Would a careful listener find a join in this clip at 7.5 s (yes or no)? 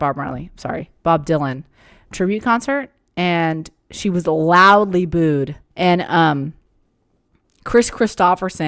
no